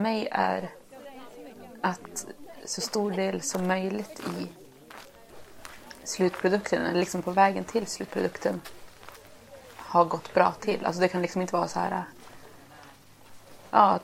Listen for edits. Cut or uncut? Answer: uncut